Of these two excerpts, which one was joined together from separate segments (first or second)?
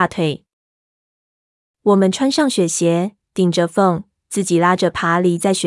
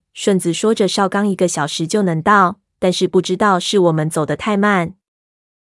first